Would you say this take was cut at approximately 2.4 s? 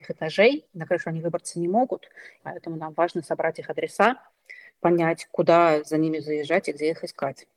yes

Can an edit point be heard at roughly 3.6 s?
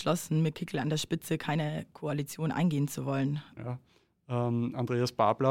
yes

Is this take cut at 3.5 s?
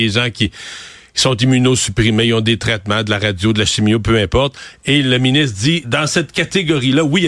no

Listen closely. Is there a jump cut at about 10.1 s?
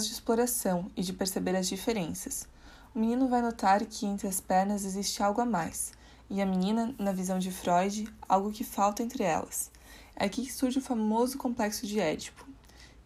yes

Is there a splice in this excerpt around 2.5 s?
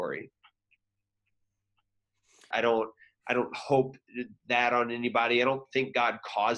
yes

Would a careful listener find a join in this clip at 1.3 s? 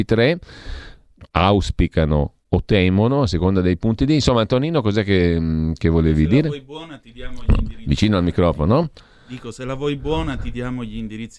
yes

